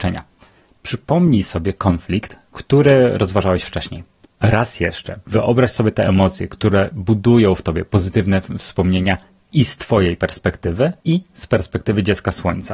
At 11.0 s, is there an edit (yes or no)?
yes